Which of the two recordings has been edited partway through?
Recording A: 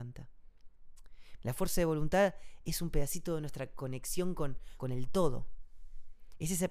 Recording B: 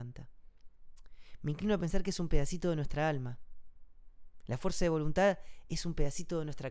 A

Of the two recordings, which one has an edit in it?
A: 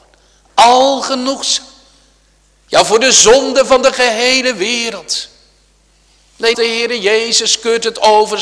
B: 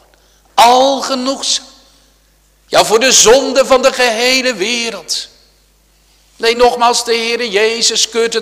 A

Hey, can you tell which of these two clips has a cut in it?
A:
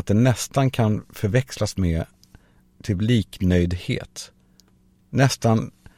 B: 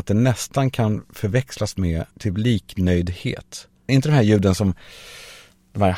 B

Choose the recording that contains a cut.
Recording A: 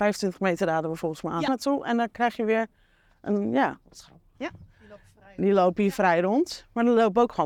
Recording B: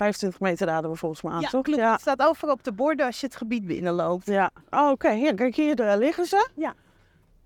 A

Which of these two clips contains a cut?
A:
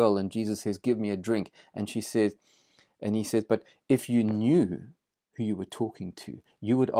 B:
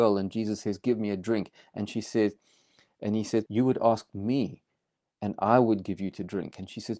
B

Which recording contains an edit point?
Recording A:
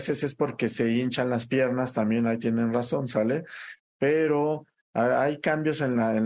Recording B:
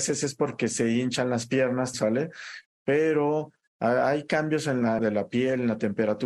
B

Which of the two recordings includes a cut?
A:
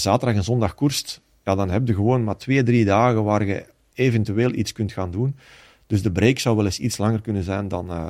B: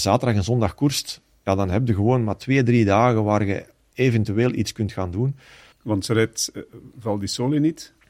B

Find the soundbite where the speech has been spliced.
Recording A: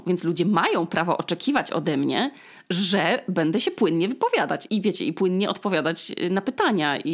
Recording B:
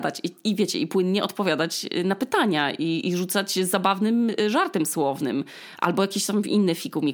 A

